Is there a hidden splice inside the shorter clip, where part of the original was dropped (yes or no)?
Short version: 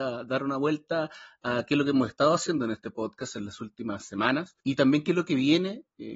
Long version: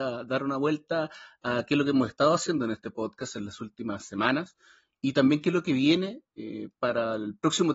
yes